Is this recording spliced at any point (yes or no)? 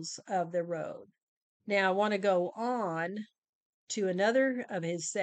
yes